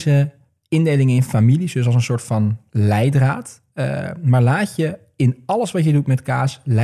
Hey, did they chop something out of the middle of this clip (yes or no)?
no